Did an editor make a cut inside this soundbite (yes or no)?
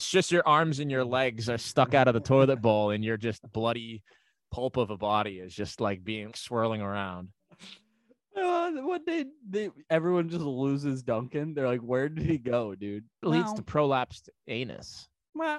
yes